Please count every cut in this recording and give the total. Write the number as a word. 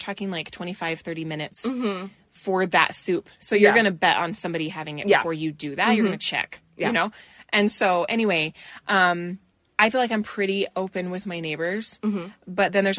zero